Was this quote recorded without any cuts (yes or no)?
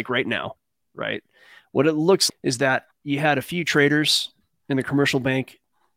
no